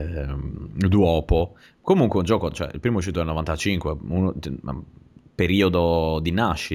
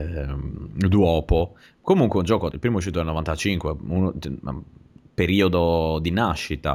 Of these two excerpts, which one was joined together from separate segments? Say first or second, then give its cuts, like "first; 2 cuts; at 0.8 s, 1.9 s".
second; 1 cut; at 2.5 s